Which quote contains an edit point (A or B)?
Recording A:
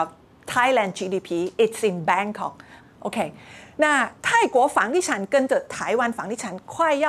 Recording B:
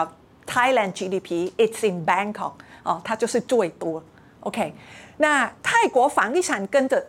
A